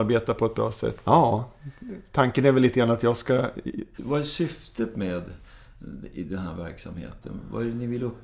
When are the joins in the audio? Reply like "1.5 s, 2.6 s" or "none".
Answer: 1.0 s, 3.9 s

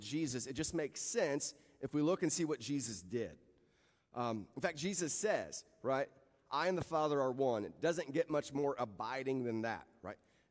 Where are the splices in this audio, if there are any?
none

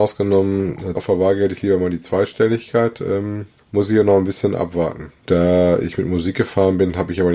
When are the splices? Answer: 0.9 s, 5.2 s

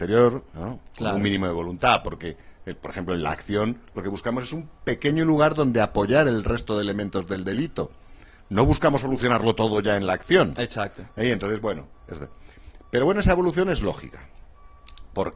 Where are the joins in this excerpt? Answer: none

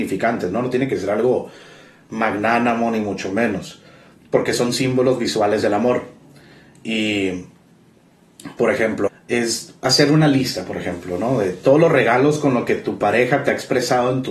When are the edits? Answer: 9.1 s

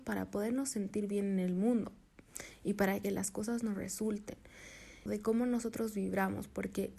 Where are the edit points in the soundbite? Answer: 5.1 s

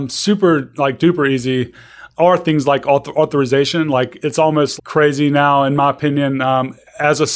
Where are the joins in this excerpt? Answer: 4.8 s

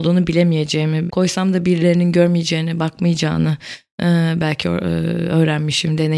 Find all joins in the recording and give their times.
1.1 s

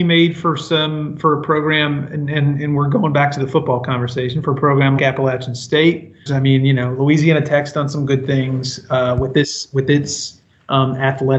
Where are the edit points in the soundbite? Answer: 5.0 s, 6.3 s

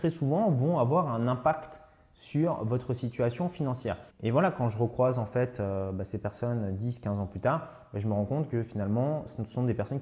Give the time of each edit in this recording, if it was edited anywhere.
4.1 s

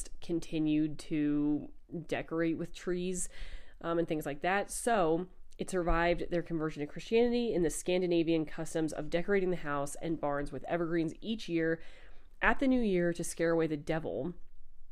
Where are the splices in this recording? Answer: none

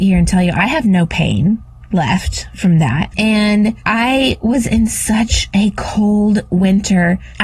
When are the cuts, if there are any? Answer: 3.1 s

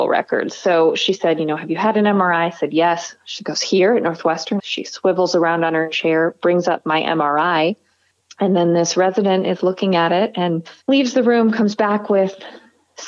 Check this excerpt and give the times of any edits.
4.6 s, 8.2 s, 10.8 s

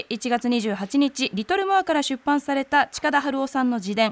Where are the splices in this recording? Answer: none

